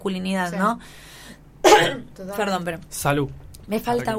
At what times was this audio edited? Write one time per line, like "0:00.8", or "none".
none